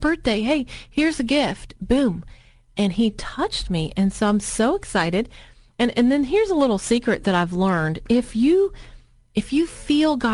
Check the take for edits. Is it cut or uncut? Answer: uncut